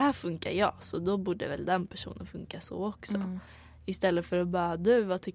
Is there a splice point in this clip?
no; 0 cuts

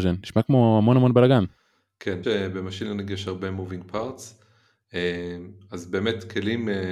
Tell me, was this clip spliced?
yes; 1 cut; at 2.2 s

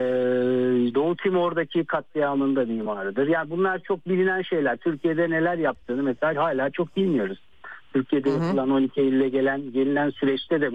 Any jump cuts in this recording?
yes; 1 cut; at 0.9 s

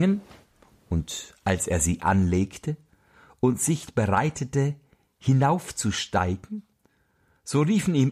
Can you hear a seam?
no; 0 cuts

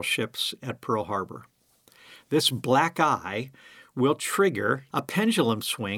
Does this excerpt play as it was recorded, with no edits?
no; 1 cut; at 4.9 s

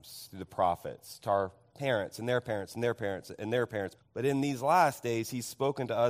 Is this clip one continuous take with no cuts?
no; 1 cut; at 4.0 s

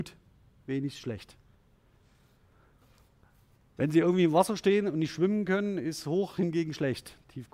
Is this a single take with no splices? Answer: yes; 0 cuts

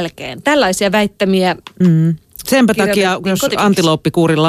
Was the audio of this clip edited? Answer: no; 0 cuts

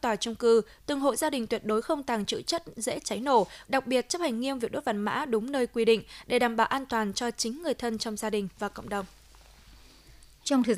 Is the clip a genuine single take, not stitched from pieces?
no; 1 cut; at 3.6 s

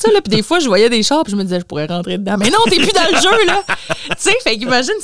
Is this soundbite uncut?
yes; 0 cuts

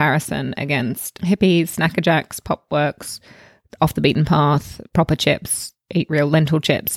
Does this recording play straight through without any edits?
yes; 0 cuts

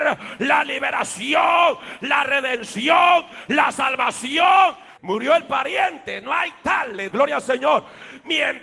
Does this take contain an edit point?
yes; 2 cuts; at 5.0 s, 7.1 s

